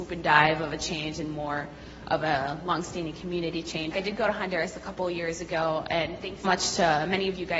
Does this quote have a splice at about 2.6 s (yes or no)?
no